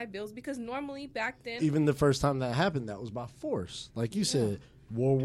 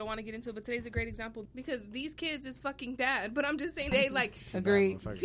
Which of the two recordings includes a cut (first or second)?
second